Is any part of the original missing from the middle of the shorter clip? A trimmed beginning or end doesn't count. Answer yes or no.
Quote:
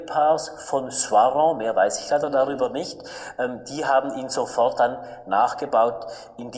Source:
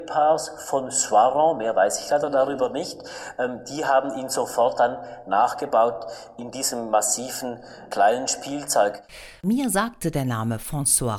no